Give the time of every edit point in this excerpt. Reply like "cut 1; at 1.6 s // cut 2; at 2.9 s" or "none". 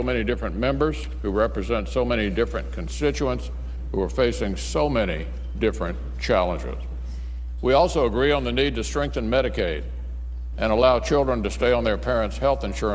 cut 1; at 7.6 s // cut 2; at 10.5 s